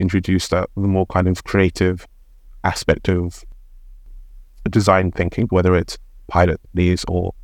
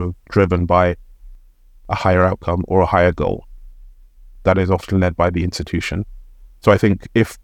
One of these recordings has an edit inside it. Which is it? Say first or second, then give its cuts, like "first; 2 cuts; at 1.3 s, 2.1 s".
first; 1 cut; at 5.5 s